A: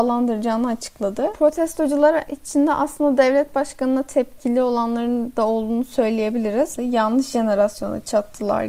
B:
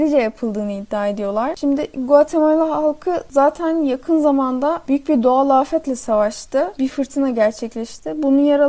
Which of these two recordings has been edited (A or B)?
A